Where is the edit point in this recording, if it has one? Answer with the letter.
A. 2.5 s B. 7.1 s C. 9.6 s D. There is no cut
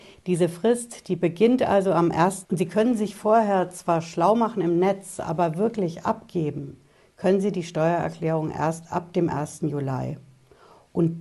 A